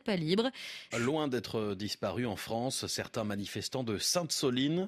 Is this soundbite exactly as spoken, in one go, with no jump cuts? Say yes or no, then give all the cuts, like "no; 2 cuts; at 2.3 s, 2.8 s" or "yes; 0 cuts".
no; 1 cut; at 0.9 s